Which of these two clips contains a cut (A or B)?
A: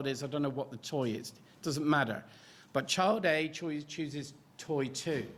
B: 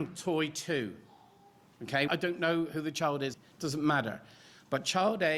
B